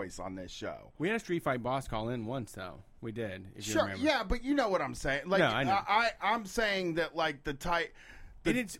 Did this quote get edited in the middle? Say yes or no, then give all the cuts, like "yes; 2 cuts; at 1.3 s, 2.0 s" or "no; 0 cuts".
no; 0 cuts